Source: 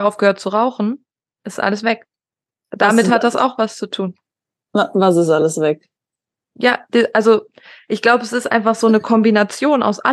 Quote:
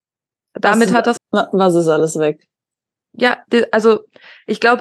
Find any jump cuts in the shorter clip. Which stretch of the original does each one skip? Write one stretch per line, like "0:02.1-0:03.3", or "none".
0:03.3-0:04.6